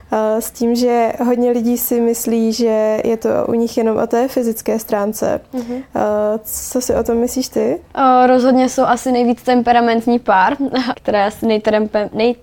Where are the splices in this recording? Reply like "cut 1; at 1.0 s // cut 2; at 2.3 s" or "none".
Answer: cut 1; at 10.9 s